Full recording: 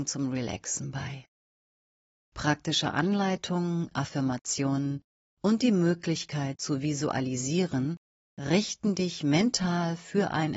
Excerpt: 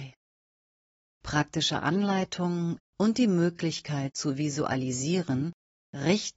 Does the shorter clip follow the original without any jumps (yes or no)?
no